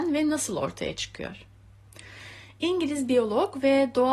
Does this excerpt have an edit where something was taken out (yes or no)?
no